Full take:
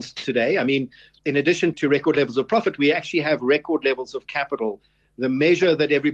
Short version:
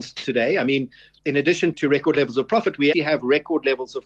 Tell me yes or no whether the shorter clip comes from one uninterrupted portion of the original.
no